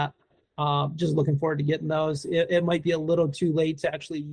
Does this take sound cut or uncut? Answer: uncut